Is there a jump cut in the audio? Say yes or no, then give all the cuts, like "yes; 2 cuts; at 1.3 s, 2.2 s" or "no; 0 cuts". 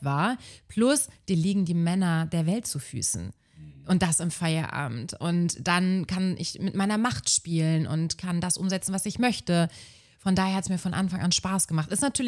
no; 0 cuts